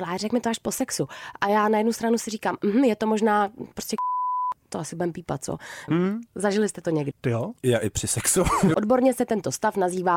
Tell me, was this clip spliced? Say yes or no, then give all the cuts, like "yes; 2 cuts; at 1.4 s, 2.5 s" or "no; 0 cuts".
yes; 3 cuts; at 5.9 s, 7.1 s, 8.7 s